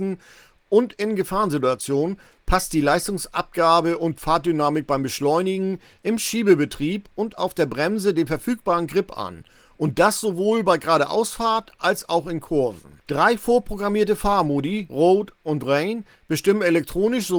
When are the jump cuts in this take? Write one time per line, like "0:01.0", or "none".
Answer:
0:13.0
0:14.9

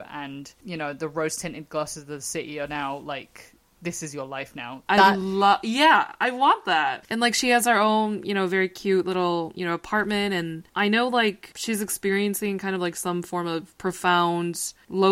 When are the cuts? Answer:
0:04.9

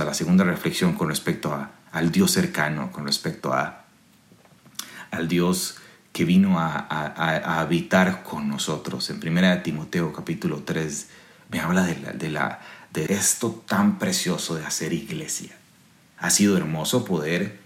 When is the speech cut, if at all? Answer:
0:13.1
0:16.2

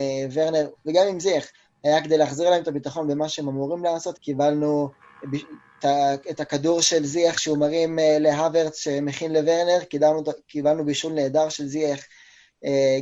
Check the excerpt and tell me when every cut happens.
0:04.1

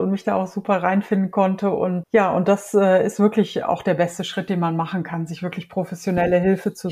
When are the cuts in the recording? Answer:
0:02.0

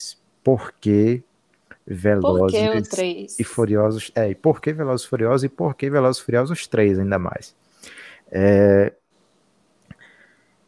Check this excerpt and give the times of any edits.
none

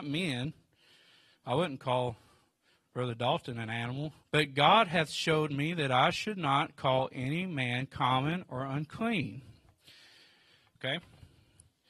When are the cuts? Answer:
0:04.2
0:10.8

